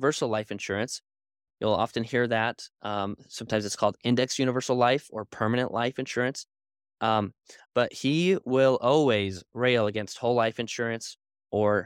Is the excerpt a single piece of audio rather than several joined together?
no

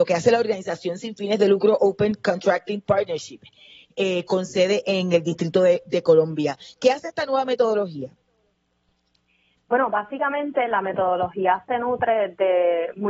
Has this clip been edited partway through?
no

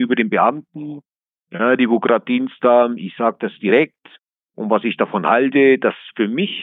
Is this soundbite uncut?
yes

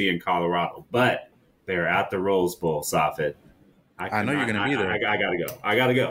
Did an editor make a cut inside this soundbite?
no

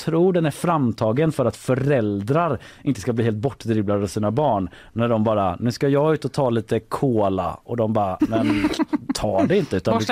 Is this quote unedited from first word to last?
no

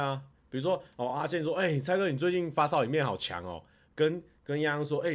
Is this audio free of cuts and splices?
yes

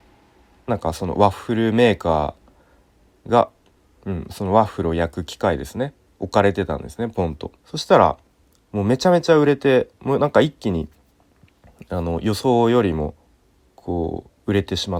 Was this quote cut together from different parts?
yes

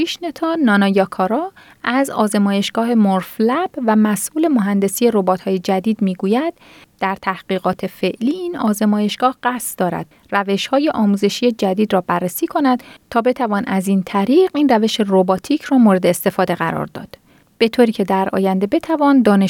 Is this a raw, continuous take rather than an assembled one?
yes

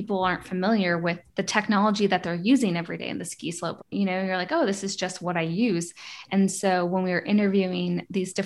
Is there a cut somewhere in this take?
yes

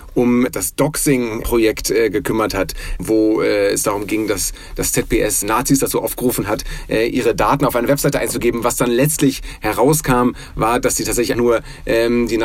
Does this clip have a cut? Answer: yes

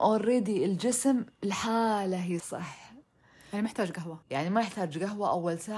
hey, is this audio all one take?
no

